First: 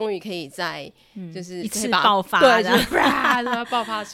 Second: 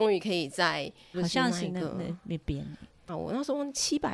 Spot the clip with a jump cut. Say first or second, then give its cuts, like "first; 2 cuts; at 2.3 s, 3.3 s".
second; 2 cuts; at 1.1 s, 3.1 s